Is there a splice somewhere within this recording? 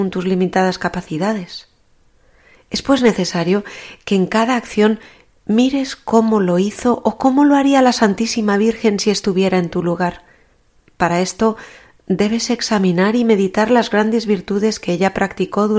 no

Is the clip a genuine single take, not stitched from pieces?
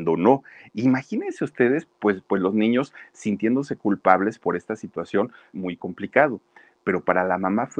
no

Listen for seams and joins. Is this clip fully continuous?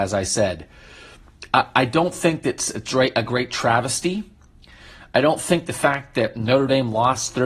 yes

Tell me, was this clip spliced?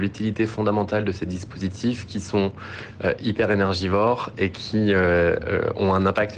no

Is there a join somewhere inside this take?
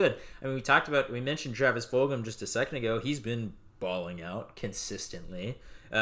no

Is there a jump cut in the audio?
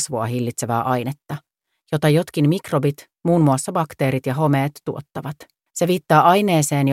yes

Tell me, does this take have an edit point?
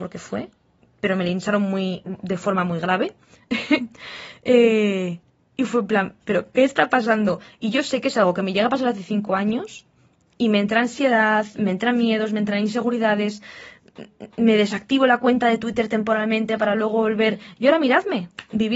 no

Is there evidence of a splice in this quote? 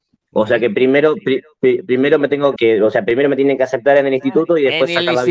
yes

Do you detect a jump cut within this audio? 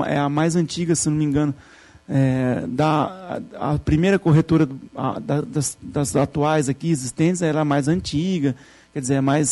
no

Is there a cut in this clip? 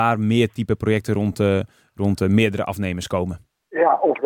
no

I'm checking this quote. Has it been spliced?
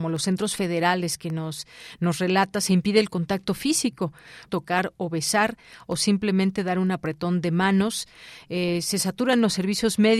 yes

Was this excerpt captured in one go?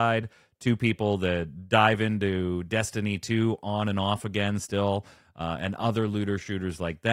yes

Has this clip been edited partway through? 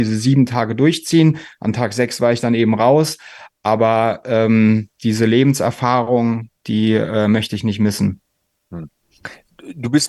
no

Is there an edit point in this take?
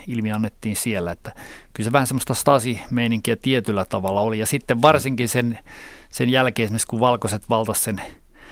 no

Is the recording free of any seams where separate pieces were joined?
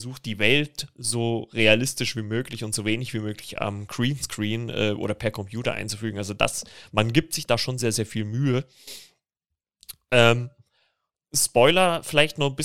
yes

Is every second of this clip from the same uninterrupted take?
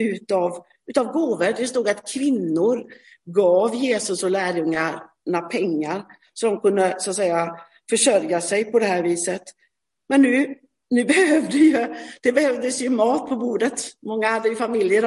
yes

